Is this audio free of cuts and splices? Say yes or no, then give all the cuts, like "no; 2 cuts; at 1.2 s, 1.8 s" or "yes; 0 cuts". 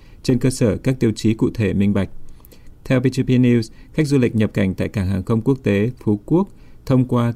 no; 1 cut; at 2.7 s